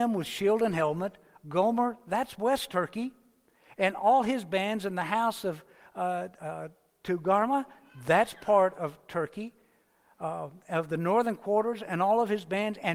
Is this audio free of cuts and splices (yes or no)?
yes